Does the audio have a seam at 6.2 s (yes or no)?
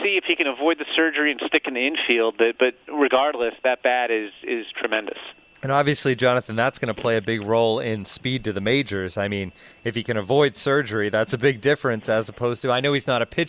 no